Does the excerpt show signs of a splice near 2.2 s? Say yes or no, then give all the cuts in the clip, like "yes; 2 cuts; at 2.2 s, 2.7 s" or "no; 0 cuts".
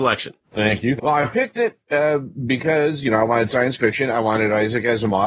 no; 1 cut; at 1.0 s